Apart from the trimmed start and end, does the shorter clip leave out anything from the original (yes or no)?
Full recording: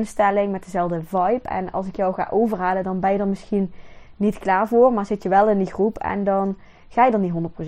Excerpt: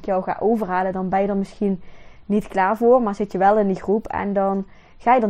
no